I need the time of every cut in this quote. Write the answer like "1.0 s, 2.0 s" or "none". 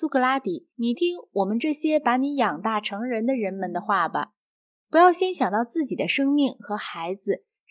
1.0 s